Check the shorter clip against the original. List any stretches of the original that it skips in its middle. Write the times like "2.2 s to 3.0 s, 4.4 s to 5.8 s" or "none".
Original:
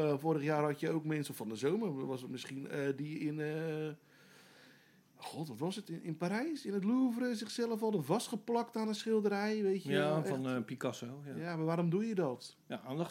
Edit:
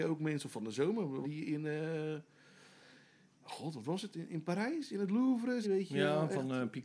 2.1 s to 3.0 s, 7.4 s to 9.6 s